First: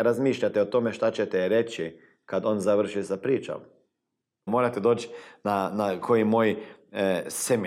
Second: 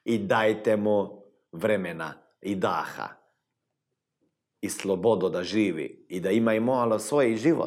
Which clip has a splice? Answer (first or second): first